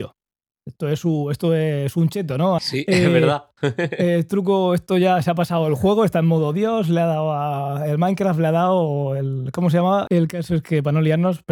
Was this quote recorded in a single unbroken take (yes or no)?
no